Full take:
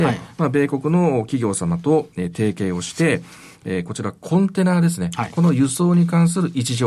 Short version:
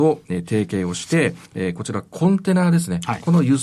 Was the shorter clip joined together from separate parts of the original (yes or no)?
yes